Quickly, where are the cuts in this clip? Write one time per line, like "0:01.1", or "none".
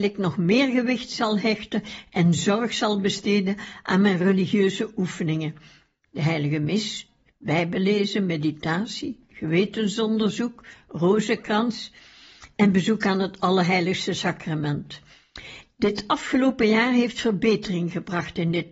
0:07.3
0:15.7